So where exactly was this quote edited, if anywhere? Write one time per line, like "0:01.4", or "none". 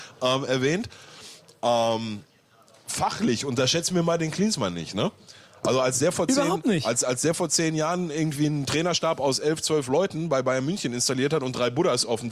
none